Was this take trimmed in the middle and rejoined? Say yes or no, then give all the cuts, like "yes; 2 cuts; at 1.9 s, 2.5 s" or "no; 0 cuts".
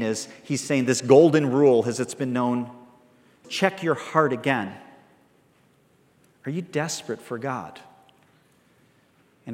yes; 1 cut; at 3.4 s